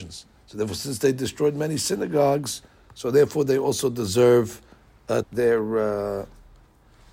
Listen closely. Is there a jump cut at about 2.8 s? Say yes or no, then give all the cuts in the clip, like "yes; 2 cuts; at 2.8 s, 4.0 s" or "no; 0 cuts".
no; 1 cut; at 5.2 s